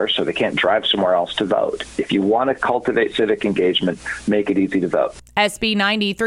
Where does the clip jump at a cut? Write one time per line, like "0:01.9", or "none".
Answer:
none